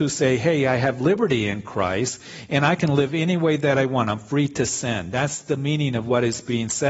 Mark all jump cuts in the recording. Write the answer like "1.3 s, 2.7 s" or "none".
none